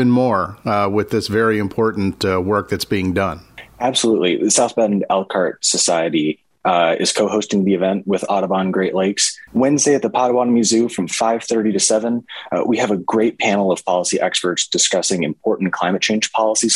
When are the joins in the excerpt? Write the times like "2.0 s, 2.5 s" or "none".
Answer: 9.5 s